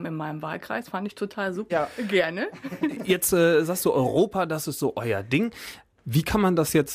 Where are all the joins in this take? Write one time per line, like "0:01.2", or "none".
0:01.7